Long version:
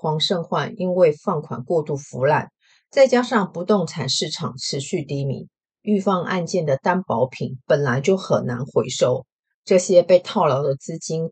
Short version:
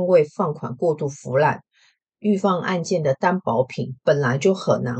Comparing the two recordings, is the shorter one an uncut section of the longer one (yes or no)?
no